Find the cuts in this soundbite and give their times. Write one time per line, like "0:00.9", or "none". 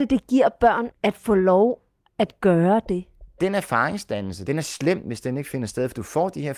0:00.9